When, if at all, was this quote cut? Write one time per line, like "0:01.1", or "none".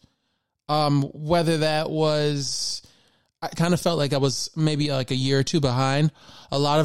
0:03.6